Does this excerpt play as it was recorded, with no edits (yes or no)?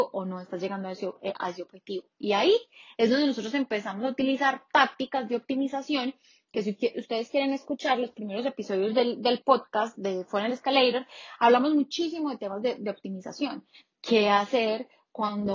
yes